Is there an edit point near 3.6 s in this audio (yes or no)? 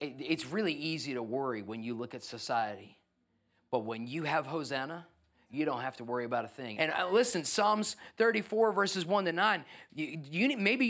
no